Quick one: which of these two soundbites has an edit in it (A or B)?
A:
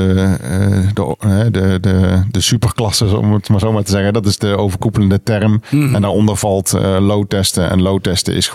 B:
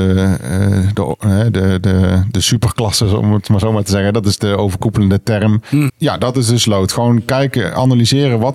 B